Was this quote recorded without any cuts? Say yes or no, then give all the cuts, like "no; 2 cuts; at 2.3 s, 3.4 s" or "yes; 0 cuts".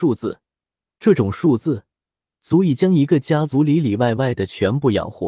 yes; 0 cuts